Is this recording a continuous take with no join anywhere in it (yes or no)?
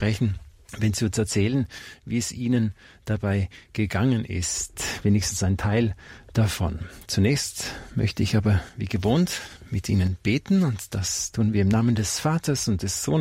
yes